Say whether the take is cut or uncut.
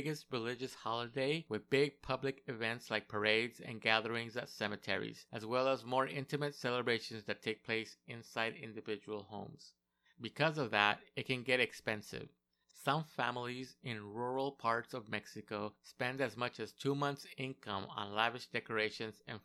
cut